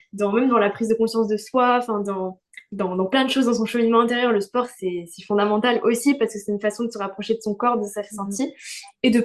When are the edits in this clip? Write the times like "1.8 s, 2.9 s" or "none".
none